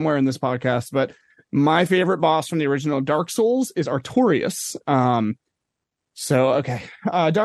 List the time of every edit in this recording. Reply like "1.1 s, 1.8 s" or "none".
none